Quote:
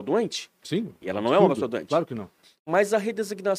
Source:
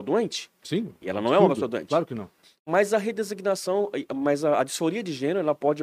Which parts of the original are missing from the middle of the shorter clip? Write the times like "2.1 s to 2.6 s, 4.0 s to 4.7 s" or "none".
none